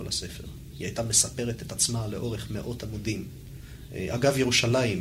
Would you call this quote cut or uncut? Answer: cut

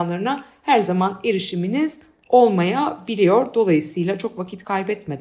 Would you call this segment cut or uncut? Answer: uncut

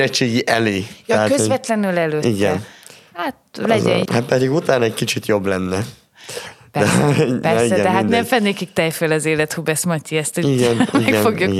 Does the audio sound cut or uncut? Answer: cut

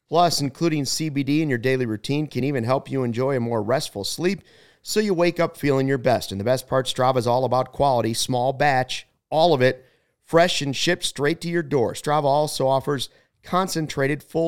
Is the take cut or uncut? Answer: uncut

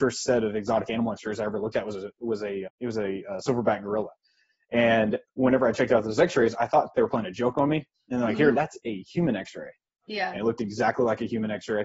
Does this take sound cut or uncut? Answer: cut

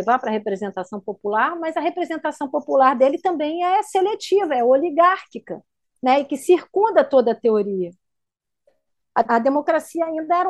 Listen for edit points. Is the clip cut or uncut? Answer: cut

